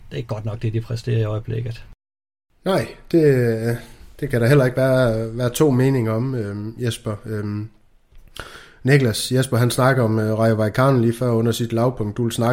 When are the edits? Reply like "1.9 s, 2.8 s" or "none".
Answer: none